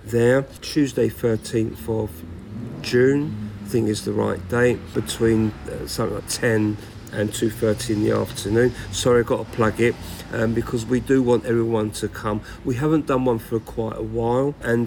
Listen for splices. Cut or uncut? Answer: cut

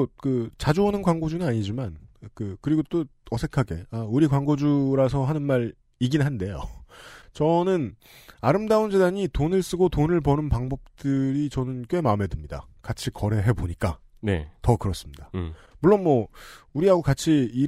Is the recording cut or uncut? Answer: uncut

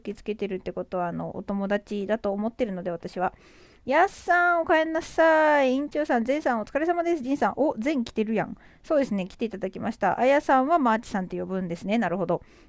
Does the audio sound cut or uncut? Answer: uncut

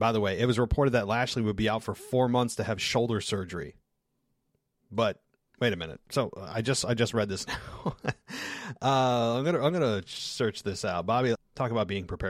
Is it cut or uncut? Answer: cut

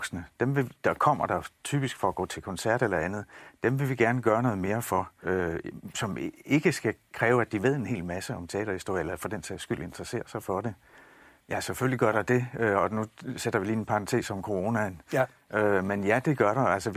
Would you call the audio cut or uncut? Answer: cut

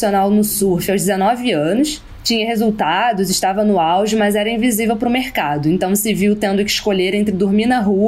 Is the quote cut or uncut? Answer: uncut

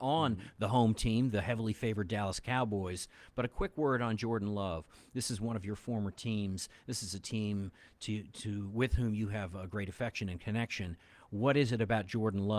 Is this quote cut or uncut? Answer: uncut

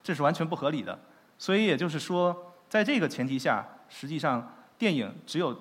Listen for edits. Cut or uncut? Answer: uncut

